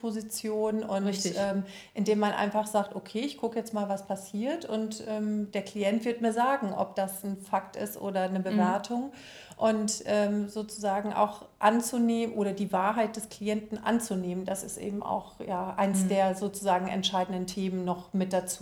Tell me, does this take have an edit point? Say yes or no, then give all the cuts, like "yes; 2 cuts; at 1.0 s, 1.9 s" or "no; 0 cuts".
no; 0 cuts